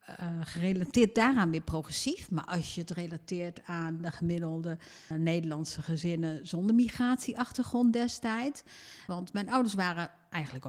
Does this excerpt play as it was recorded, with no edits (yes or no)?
no